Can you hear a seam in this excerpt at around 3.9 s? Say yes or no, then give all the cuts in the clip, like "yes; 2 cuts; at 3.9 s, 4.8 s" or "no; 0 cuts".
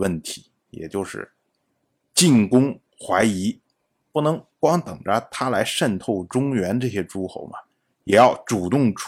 no; 0 cuts